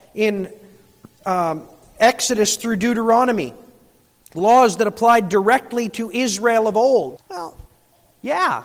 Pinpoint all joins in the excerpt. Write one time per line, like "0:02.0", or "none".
0:07.2